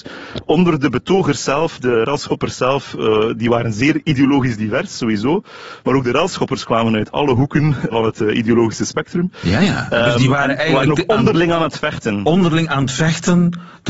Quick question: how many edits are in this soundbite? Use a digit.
1